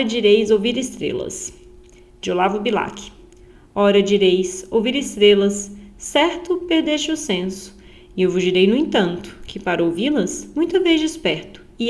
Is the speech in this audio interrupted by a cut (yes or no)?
no